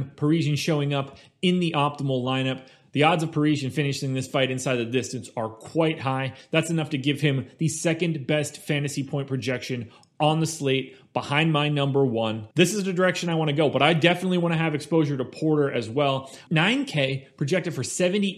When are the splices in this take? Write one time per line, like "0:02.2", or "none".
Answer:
0:12.5
0:16.5